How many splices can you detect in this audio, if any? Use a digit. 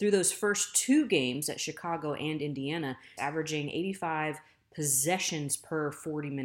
1